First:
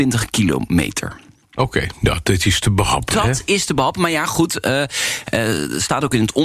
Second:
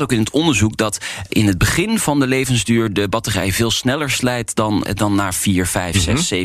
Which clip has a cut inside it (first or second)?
second